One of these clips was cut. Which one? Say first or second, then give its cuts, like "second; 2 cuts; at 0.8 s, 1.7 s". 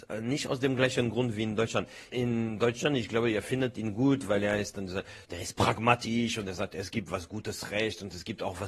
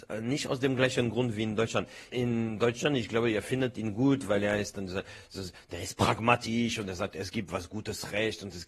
first; 1 cut; at 5.2 s